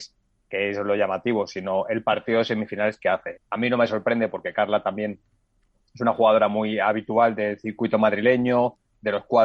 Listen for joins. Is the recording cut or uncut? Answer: cut